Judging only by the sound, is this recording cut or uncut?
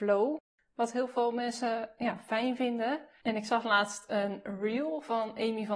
cut